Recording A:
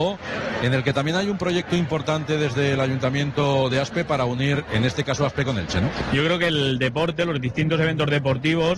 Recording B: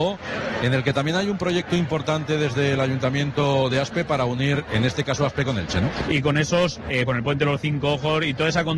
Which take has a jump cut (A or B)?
B